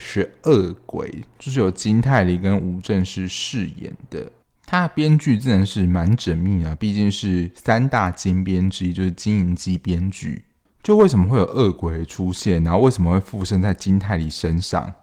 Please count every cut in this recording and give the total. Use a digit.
0